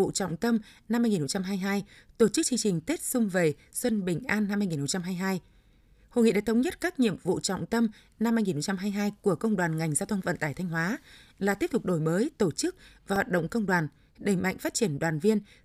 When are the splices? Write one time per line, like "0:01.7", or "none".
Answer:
none